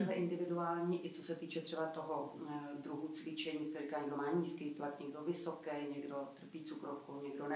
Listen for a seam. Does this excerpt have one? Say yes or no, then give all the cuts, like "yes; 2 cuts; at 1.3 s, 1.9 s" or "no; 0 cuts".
no; 0 cuts